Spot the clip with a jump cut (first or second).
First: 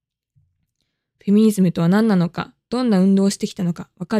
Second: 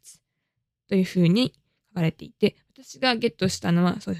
first